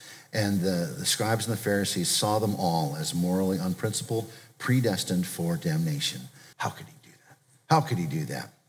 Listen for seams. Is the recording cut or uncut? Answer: cut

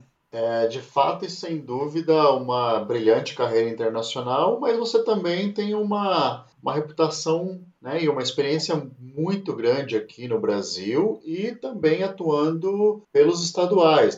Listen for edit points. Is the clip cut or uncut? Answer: uncut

